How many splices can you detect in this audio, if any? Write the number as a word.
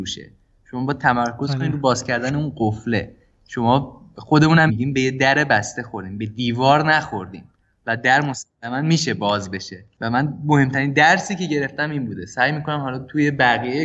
one